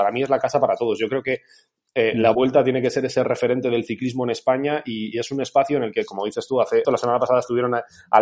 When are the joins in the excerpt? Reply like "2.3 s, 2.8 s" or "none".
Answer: 6.8 s